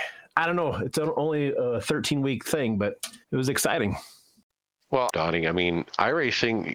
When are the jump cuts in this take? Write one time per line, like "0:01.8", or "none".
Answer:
0:03.2
0:05.1

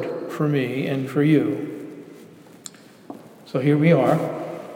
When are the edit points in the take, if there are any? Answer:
0:01.1

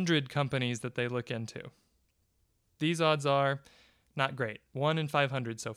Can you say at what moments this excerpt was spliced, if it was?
none

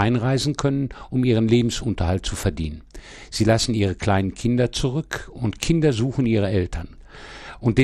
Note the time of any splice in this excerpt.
none

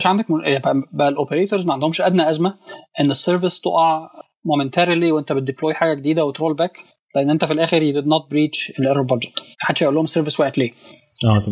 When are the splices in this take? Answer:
0:09.5

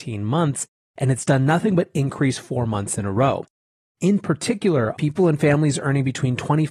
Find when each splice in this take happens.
0:04.9

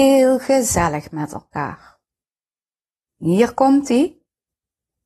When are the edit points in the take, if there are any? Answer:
0:03.1

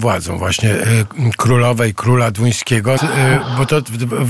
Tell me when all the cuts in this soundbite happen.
0:03.0

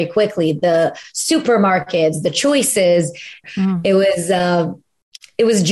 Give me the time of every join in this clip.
0:03.4

